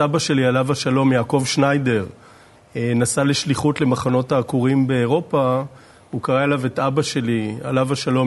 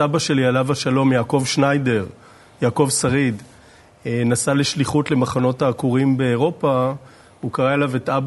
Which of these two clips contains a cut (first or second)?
first